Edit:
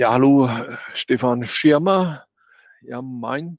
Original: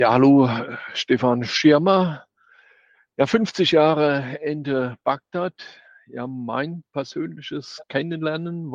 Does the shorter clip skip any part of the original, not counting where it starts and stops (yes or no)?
yes